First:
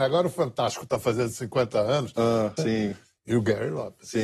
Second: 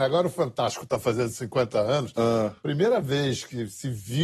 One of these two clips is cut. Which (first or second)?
first